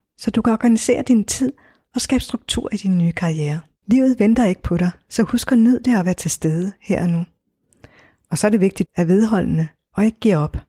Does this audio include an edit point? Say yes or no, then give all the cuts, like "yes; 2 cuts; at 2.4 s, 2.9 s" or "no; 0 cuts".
yes; 2 cuts; at 3.8 s, 8.9 s